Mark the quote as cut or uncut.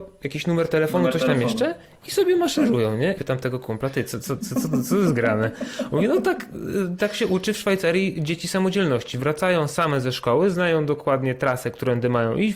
cut